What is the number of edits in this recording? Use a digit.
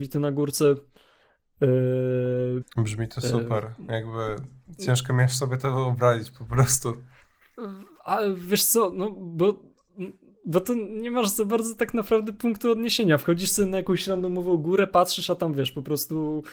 1